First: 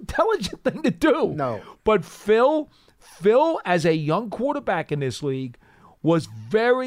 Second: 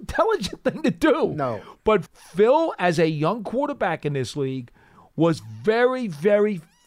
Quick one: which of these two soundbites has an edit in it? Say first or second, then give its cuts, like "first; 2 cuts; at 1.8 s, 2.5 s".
second; 1 cut; at 2.1 s